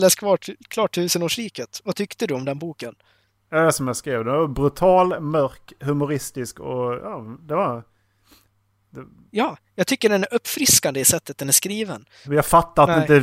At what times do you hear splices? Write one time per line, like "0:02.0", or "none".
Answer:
0:09.3
0:12.2

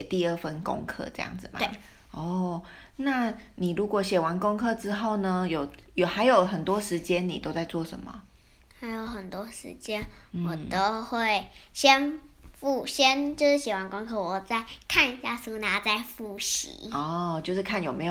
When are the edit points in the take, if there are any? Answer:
none

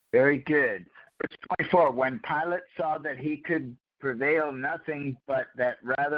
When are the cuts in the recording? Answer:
0:01.1

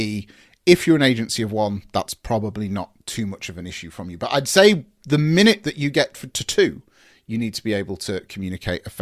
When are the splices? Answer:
none

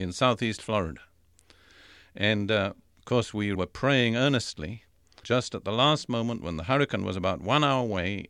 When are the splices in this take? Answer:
0:03.5
0:05.2

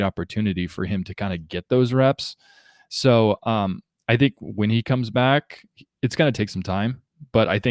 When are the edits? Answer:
none

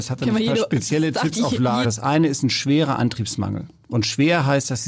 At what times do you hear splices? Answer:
0:01.8

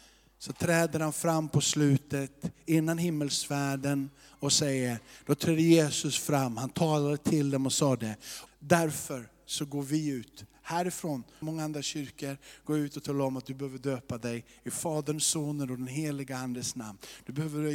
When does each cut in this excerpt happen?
0:08.5
0:11.4

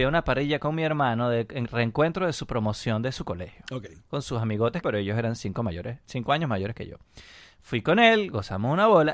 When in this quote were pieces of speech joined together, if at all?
0:04.8

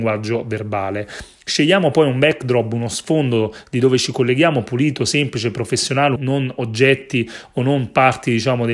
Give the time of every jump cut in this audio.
0:06.2

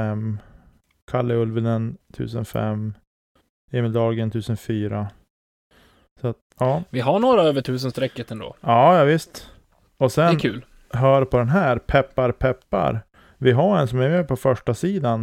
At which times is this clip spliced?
0:06.5

